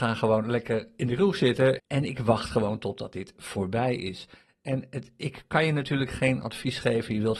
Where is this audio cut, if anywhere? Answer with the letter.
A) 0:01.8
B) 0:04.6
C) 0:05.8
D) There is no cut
A